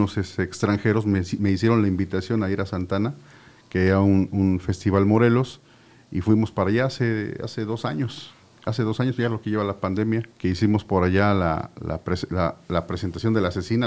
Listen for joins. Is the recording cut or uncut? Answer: cut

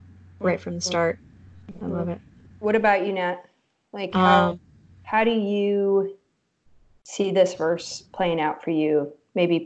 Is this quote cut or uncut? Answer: uncut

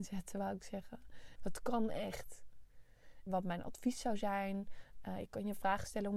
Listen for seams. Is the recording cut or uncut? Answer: cut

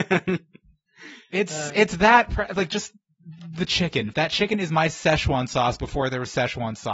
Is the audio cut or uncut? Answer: cut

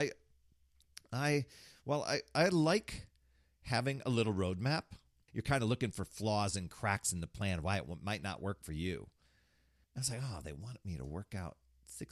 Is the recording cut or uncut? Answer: cut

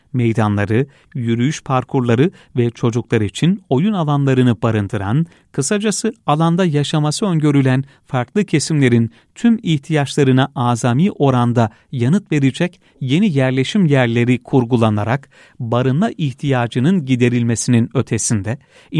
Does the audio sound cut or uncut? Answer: cut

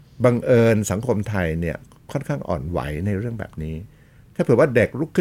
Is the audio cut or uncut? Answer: uncut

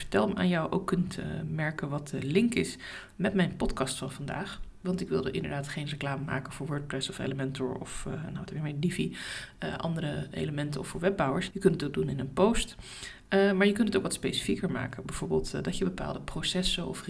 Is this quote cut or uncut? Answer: cut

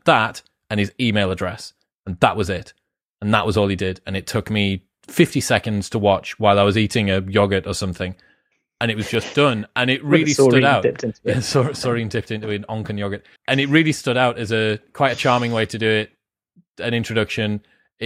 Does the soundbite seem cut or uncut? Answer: cut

